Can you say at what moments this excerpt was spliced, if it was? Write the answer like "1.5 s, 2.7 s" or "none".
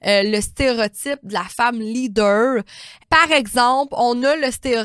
none